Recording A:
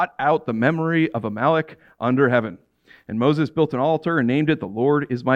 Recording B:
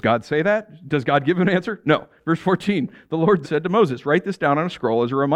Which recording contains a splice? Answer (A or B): B